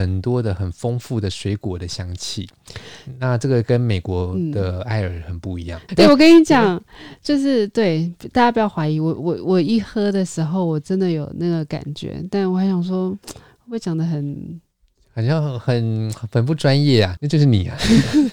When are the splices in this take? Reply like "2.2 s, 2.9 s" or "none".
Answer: 5.9 s, 17.2 s